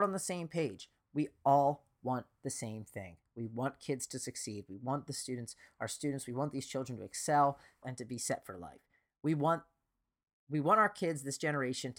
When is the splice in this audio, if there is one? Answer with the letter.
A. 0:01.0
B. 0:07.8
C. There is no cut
B